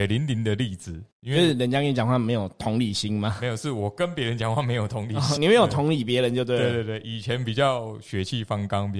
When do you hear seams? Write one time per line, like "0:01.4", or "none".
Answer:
0:05.4